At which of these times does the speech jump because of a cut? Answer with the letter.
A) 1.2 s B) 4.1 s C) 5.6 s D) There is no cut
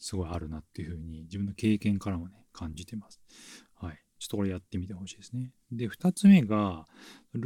D